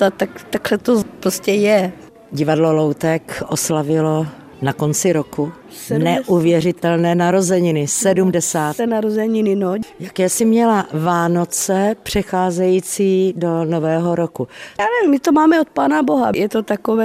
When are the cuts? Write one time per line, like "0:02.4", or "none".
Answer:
0:08.8
0:14.8